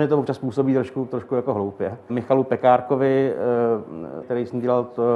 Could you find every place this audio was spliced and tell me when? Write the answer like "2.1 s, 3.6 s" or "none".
2.1 s, 4.2 s